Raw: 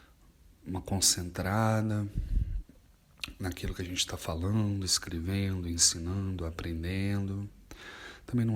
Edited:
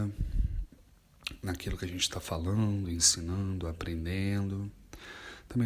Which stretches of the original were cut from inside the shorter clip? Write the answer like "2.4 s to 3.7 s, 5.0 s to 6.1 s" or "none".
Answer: 4.8 s to 5.6 s